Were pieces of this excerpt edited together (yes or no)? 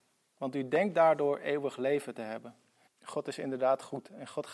yes